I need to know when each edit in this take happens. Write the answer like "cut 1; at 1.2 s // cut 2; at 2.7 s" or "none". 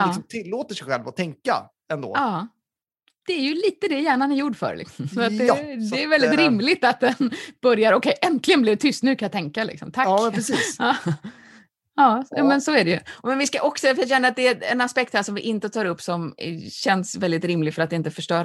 none